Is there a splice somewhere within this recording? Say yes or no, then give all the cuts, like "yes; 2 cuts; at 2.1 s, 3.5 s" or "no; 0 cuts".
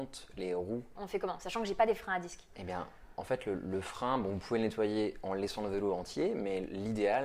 yes; 1 cut; at 1.0 s